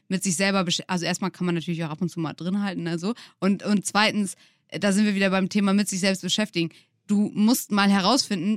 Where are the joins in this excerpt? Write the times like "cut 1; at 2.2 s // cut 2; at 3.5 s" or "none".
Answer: none